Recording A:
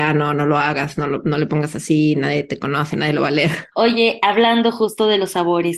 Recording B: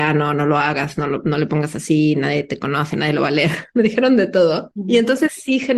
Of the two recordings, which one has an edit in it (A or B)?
A